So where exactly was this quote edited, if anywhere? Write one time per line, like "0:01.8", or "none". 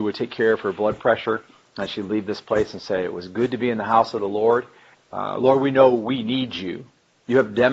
0:04.9